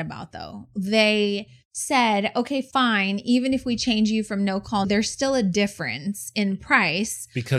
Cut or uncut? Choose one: cut